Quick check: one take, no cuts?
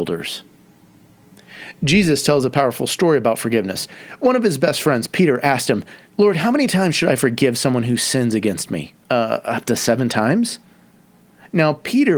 no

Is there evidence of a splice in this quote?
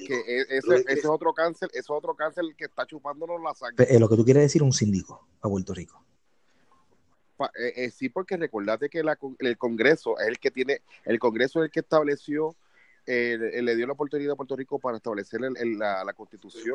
yes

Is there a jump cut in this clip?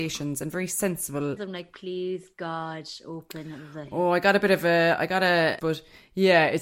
yes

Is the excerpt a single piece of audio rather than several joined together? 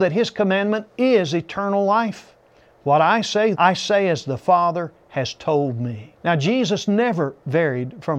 no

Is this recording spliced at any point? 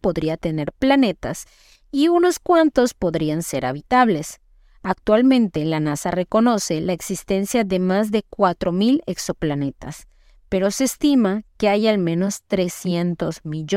no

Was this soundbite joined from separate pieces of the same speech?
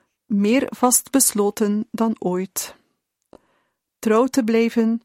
no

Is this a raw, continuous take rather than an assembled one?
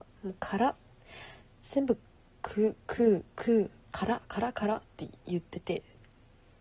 yes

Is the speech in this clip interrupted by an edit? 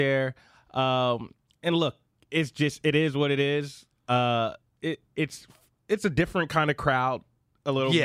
no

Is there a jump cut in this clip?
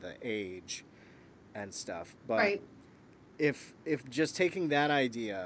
no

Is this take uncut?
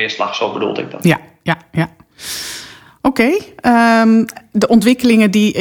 yes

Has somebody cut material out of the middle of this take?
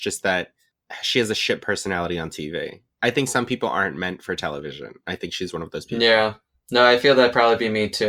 no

